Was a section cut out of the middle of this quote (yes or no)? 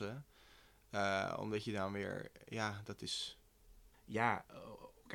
yes